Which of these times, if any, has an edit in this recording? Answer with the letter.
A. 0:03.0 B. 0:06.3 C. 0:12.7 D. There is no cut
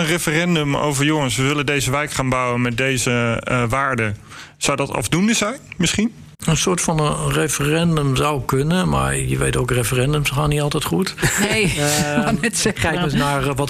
B